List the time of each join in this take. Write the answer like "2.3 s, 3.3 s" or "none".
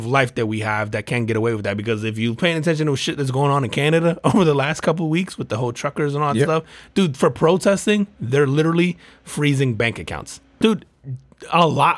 10.6 s